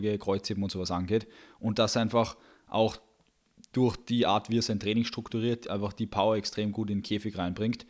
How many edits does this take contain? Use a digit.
0